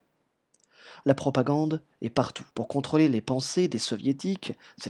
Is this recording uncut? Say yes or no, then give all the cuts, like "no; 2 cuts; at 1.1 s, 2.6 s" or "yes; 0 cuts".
no; 2 cuts; at 1.0 s, 2.5 s